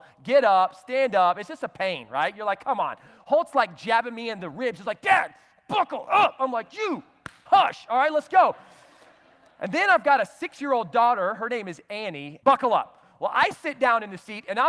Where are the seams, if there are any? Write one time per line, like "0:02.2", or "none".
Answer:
0:12.4